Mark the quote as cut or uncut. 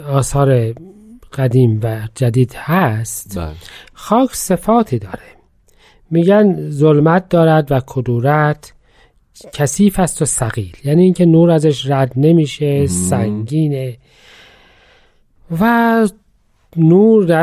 uncut